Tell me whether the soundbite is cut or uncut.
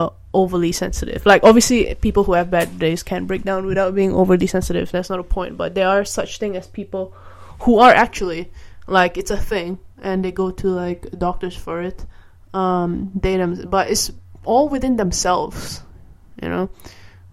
uncut